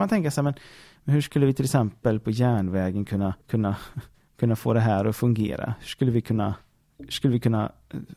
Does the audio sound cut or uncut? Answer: cut